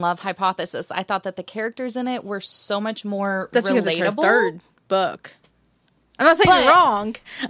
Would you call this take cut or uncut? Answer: uncut